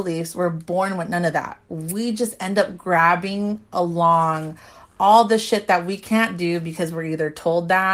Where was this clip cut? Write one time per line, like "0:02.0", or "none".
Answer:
none